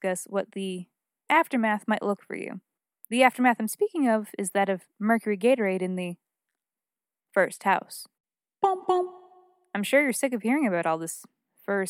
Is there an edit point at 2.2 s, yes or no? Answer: yes